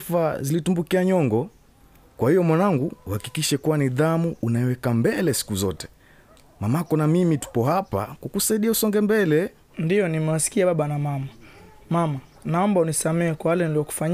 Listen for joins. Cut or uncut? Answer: cut